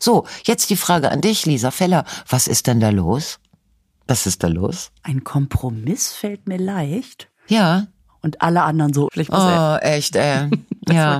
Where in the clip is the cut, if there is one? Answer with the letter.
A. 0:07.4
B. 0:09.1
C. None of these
B